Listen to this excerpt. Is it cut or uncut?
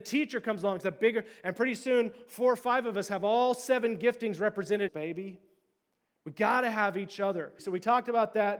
cut